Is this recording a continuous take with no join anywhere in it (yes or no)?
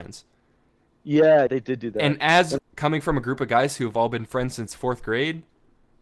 no